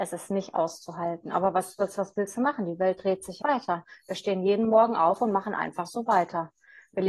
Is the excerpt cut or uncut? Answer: cut